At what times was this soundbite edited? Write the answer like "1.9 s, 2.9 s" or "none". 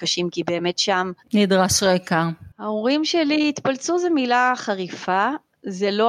2.5 s